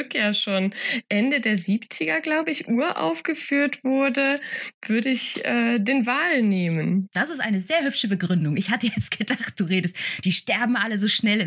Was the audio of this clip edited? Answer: no; 0 cuts

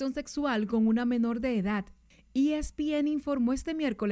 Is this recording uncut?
yes; 0 cuts

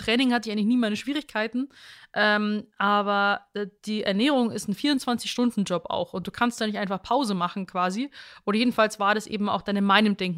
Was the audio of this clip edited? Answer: no; 0 cuts

